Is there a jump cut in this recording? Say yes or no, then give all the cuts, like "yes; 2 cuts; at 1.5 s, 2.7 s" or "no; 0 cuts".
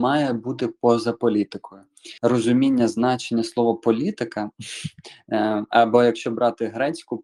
yes; 1 cut; at 2.2 s